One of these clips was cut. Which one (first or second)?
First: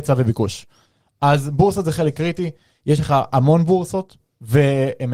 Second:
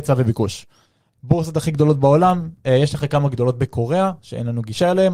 second